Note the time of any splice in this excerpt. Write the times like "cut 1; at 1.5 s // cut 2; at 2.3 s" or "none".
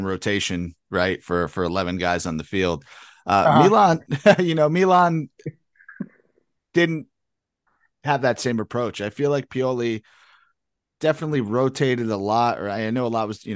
none